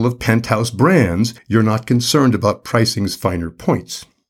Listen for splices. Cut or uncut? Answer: cut